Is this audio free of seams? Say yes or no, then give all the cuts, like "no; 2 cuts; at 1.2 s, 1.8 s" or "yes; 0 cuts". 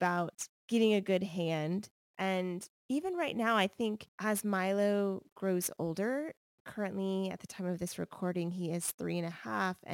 no; 1 cut; at 2.0 s